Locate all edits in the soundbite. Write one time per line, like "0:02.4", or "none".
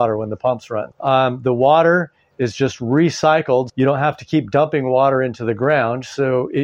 0:00.9
0:03.7